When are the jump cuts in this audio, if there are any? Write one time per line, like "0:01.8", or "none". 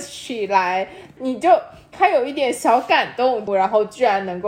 0:01.2
0:03.5